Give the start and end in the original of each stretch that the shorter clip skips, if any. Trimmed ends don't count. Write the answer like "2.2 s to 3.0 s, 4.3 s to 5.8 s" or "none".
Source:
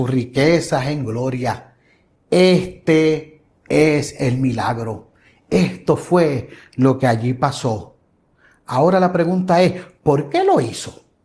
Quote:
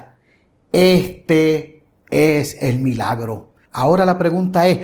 5.2 s to 8.6 s